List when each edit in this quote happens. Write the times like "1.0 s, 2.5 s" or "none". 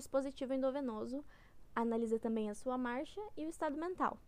none